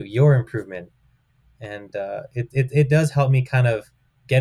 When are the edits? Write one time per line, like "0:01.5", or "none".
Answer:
none

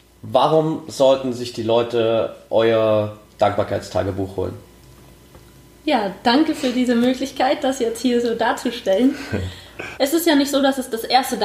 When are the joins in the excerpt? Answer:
0:09.9

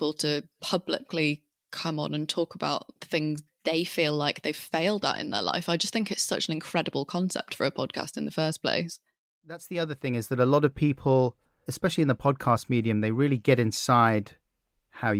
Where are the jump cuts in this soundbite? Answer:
none

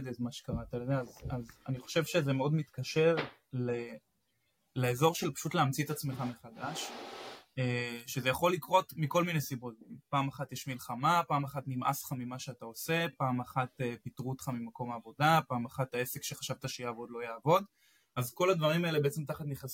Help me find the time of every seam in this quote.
none

